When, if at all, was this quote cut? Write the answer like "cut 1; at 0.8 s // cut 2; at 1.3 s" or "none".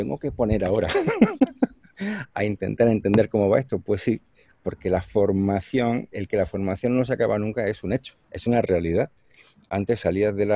cut 1; at 6.1 s // cut 2; at 8.2 s